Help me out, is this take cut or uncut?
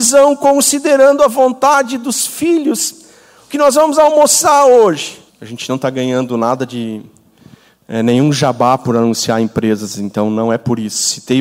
cut